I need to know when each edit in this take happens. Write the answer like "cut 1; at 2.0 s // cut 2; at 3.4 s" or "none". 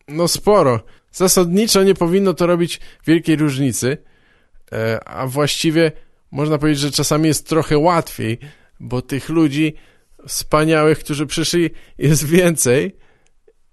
none